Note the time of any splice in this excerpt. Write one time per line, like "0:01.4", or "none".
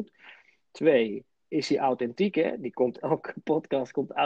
0:03.0